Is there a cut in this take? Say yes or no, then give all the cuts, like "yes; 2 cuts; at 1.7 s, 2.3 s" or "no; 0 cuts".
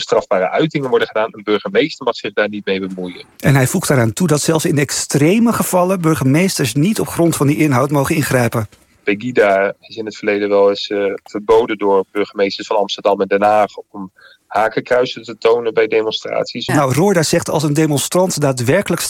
yes; 1 cut; at 16.7 s